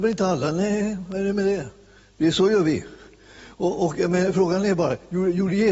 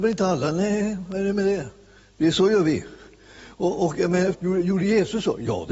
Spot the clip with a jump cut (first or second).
second